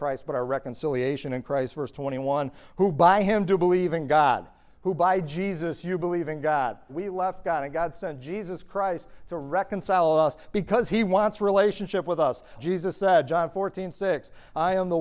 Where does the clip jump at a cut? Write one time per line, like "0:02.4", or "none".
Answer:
0:06.9
0:12.6

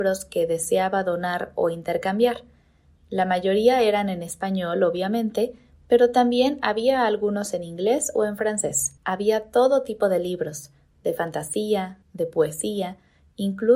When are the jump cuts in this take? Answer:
0:03.0
0:09.0
0:12.0

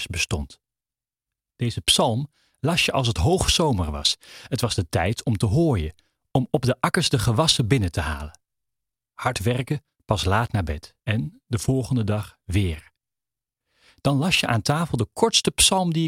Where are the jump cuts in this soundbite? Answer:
0:09.9
0:11.0

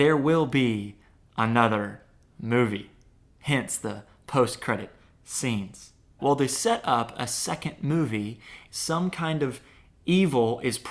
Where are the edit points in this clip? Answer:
0:06.2
0:08.7

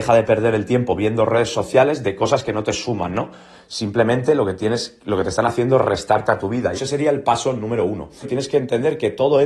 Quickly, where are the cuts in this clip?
0:06.7
0:08.2

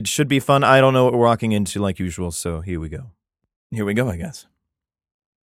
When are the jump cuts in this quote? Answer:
0:03.6

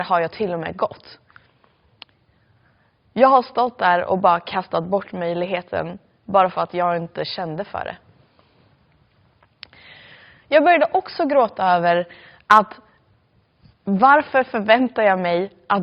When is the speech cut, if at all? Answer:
none

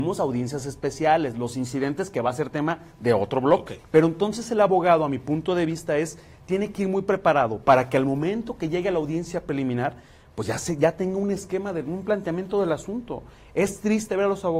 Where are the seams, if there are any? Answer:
0:03.8

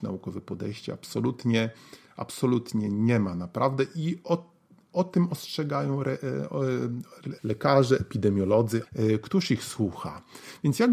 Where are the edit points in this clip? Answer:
0:07.4
0:08.8

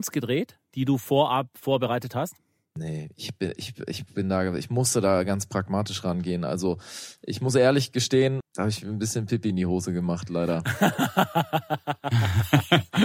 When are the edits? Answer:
0:08.4

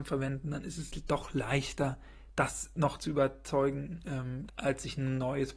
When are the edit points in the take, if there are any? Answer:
0:04.5

